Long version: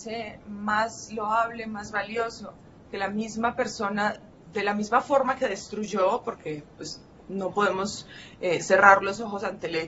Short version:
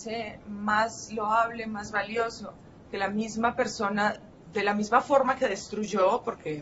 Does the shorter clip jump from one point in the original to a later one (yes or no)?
no